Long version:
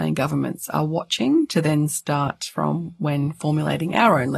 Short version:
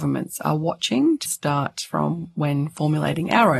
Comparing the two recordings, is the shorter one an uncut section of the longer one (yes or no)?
no